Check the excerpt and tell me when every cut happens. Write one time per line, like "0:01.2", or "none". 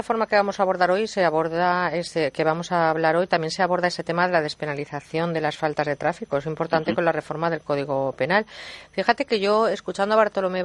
none